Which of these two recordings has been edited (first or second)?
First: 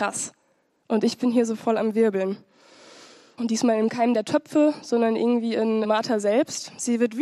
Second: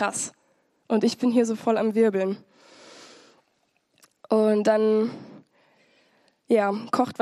first